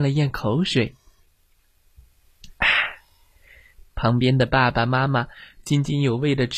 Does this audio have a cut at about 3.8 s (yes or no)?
yes